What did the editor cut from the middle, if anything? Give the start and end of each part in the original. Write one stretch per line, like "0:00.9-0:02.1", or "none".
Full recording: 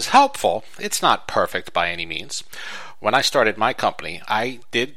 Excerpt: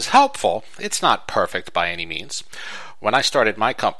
none